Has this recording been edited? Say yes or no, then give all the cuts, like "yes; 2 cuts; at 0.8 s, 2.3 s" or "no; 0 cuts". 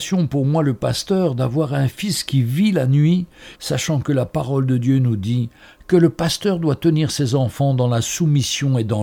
yes; 1 cut; at 3.6 s